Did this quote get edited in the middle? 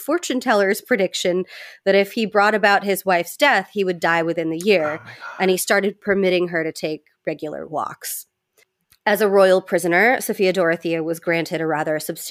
no; 0 cuts

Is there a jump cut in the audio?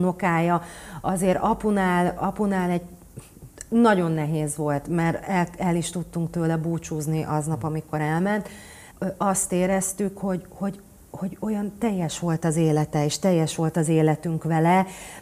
yes; 1 cut; at 8.9 s

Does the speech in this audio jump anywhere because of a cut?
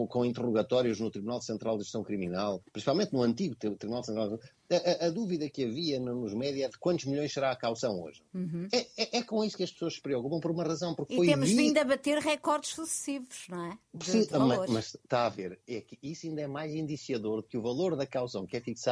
no; 0 cuts

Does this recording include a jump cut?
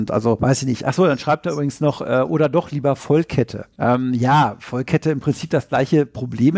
no; 0 cuts

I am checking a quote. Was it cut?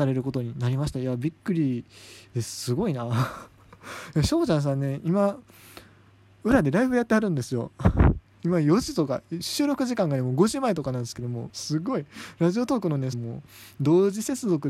yes; 2 cuts; at 11.5 s, 13.1 s

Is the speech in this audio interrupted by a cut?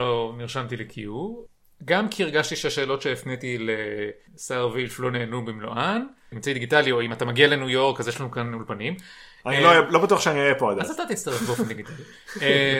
yes; 1 cut; at 6.3 s

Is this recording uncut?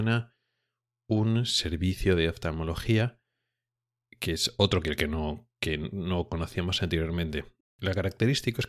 yes; 0 cuts

